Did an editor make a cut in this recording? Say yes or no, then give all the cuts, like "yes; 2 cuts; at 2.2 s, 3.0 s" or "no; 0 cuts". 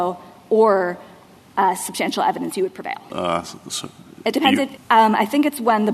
yes; 2 cuts; at 3.1 s, 4.8 s